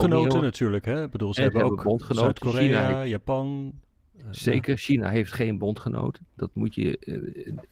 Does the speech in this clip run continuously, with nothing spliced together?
yes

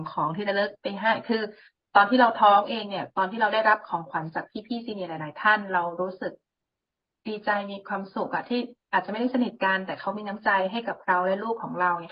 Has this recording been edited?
no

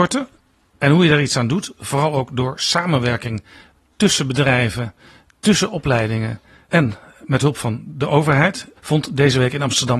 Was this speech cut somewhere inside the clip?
yes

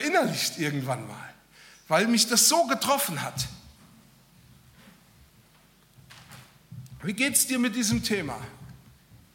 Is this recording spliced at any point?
no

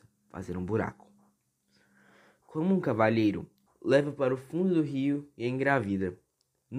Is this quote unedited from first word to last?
no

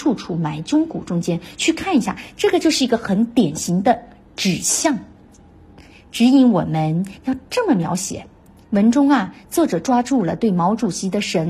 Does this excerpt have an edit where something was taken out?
yes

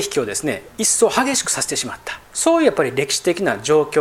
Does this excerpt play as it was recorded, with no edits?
no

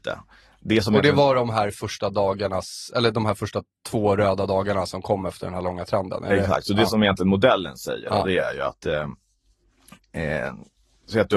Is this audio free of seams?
yes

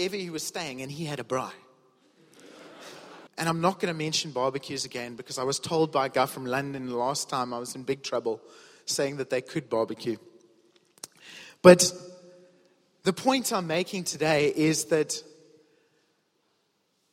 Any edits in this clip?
yes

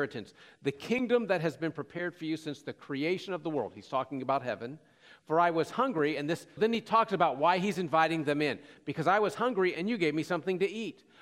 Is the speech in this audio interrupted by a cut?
yes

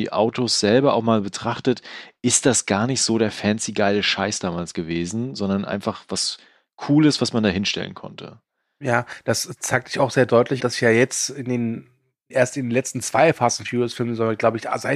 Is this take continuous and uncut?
no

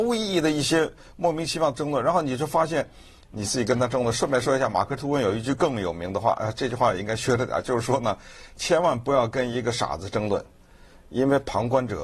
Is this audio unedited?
yes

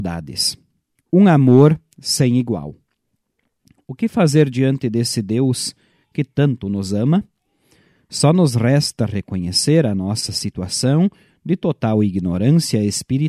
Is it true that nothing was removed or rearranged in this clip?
no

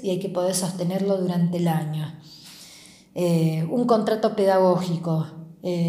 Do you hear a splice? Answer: no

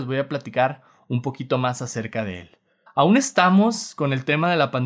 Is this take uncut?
no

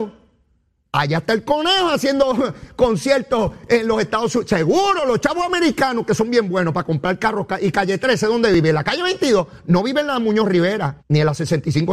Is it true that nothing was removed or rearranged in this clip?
no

